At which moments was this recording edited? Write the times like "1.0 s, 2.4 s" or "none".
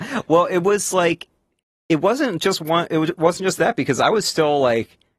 none